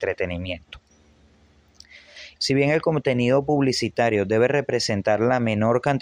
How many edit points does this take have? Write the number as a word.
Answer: one